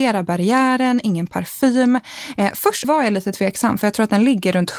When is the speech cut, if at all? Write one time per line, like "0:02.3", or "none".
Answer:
0:02.8